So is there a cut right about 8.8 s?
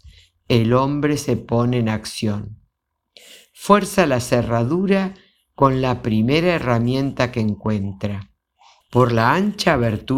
yes; 1 cut; at 8.8 s

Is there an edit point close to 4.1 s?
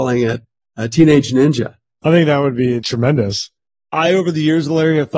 no; 0 cuts

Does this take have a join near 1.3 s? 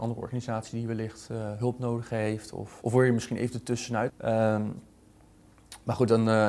no; 2 cuts; at 2.8 s, 4.1 s

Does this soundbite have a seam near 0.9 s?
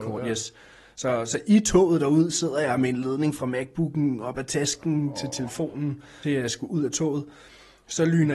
no; 1 cut; at 6.2 s

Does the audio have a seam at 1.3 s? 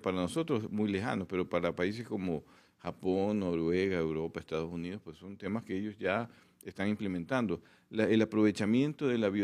no; 0 cuts

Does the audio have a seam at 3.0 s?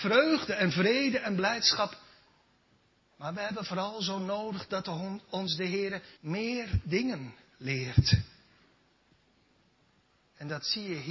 yes; 2 cuts; at 3.0 s, 6.2 s

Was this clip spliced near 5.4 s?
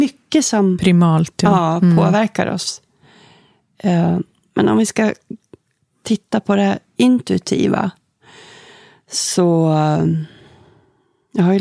no; 0 cuts

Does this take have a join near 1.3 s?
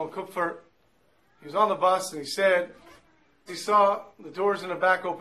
no; 1 cut; at 3.5 s

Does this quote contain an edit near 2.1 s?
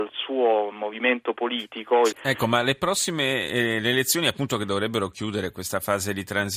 yes; 1 cut; at 2.1 s

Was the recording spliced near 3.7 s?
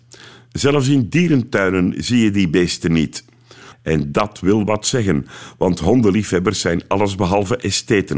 yes; 1 cut; at 3.7 s

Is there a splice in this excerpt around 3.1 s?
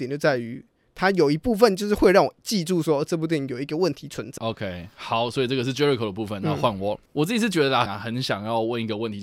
no; 2 cuts; at 4.4 s, 7.9 s

